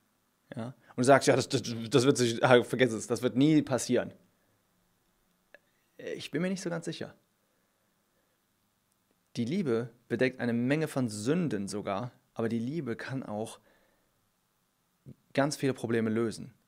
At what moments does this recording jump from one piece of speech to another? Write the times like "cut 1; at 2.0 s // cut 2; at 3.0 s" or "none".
none